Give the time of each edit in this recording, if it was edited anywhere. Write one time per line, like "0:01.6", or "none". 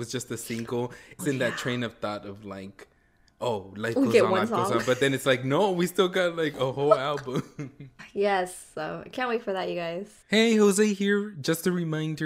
0:01.2
0:08.0
0:10.2